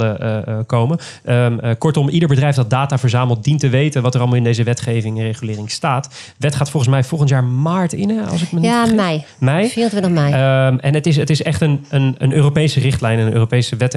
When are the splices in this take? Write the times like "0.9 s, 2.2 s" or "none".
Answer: none